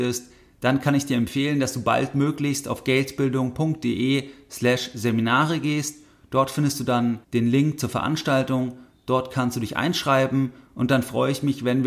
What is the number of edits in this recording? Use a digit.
1